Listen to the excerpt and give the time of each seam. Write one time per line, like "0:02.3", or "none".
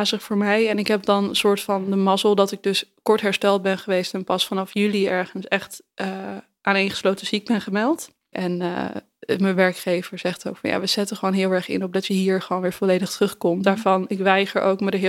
0:08.3
0:13.6